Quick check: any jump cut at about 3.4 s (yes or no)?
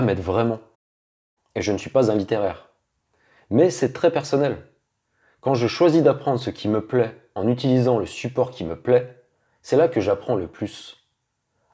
no